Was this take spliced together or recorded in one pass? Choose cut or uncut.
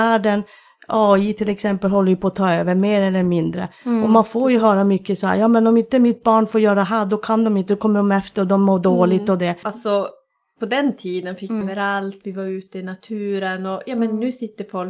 cut